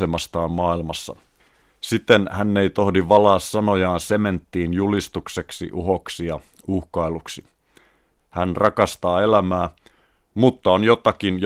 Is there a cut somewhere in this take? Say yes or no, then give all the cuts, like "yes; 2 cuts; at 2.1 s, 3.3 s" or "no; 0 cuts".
yes; 1 cut; at 8.2 s